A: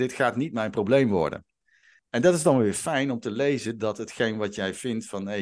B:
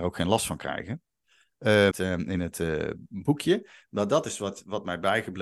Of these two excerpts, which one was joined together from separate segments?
B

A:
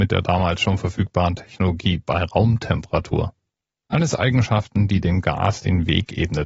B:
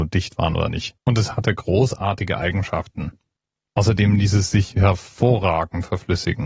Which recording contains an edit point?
B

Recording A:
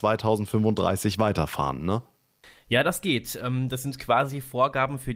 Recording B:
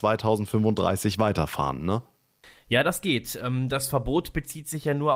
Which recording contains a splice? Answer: A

